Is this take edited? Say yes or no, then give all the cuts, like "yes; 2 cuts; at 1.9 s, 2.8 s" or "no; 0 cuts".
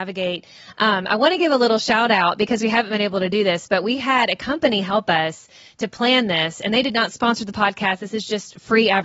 no; 0 cuts